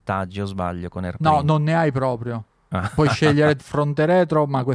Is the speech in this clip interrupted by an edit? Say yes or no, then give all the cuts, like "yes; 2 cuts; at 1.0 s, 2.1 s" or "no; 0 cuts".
yes; 1 cut; at 3.6 s